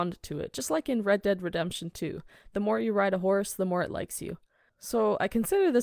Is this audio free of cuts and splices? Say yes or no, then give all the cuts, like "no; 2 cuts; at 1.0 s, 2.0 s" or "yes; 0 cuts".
no; 1 cut; at 4.7 s